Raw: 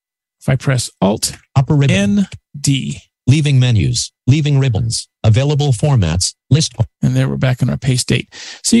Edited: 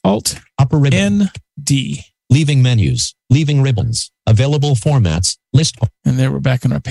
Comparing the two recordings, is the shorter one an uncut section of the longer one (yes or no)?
yes